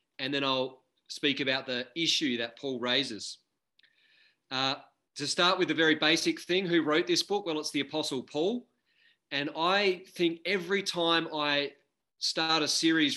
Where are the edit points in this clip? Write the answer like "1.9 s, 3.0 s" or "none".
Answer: none